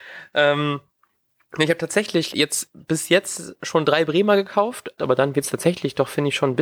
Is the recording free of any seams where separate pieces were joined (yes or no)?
no